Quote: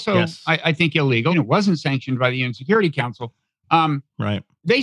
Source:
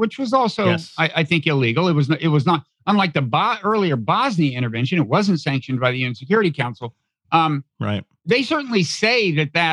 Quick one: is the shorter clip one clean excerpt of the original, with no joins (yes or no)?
no